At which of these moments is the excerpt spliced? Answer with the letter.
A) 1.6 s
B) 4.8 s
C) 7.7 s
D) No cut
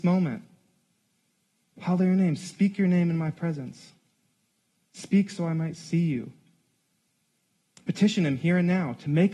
D